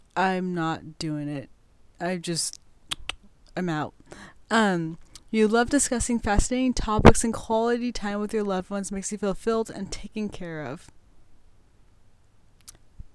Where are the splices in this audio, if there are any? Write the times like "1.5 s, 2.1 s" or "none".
none